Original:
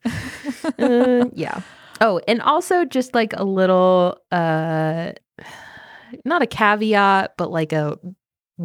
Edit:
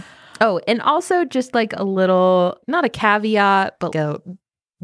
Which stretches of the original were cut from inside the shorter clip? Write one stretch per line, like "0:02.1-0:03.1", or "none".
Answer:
0:04.2-0:06.2
0:07.5-0:07.7